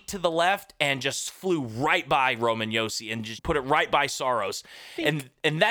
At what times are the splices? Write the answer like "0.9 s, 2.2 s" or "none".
3.4 s